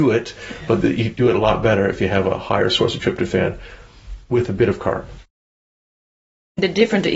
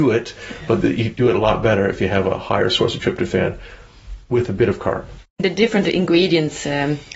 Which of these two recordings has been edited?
second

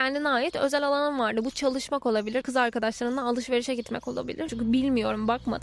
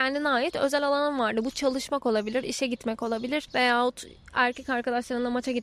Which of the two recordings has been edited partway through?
first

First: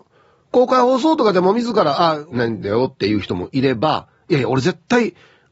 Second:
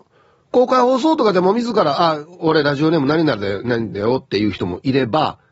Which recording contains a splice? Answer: first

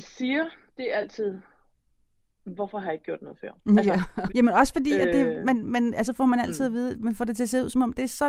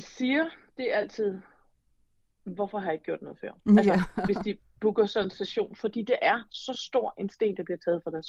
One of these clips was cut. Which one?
first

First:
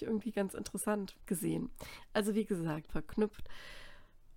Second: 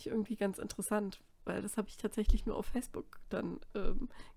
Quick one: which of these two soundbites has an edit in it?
first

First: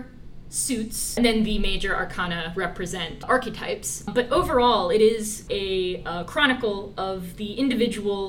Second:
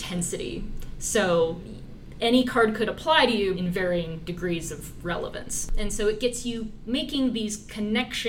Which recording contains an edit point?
second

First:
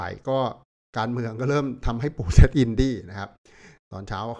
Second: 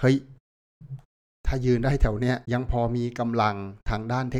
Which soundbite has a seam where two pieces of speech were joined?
second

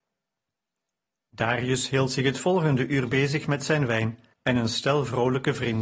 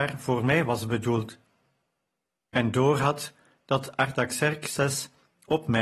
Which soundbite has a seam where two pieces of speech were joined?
first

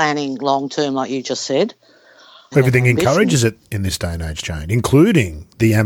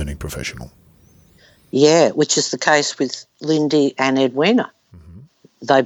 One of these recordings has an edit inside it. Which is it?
first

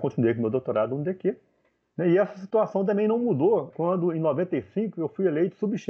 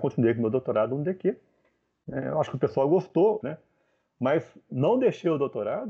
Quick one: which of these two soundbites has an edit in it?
second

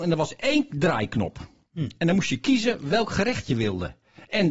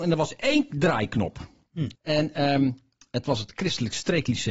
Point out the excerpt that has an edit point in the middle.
second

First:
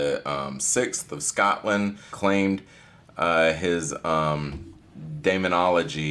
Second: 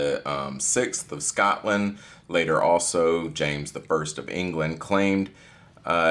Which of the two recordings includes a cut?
first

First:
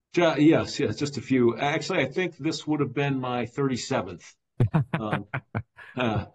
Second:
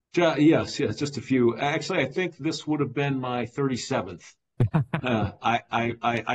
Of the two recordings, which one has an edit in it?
second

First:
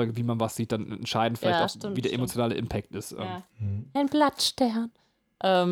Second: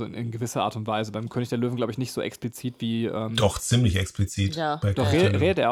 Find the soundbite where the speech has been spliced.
first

